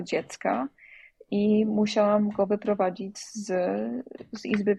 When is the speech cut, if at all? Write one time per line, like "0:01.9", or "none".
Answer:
none

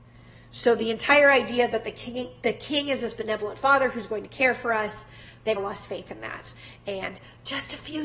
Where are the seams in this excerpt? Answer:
0:05.6

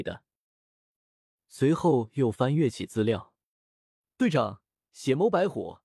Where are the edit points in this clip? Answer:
0:01.0

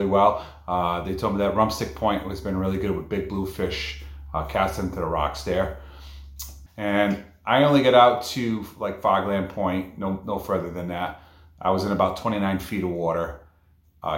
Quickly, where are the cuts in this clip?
0:06.7

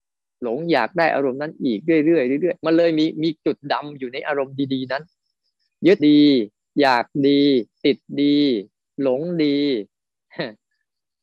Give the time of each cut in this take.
0:06.0

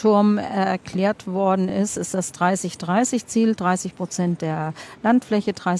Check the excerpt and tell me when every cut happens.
none

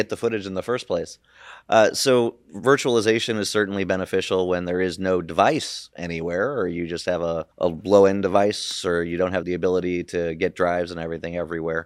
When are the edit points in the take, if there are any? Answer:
0:07.5
0:09.4

